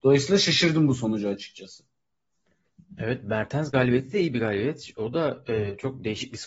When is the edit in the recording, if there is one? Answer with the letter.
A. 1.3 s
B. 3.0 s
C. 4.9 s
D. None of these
D